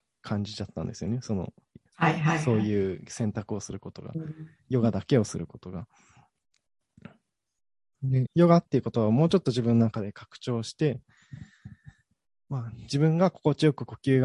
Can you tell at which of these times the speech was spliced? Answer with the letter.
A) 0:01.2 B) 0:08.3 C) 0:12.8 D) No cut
B